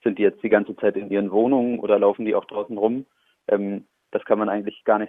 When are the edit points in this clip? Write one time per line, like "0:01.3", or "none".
none